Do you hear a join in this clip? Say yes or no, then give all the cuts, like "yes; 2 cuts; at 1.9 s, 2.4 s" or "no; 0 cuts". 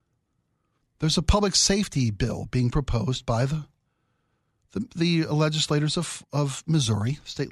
no; 0 cuts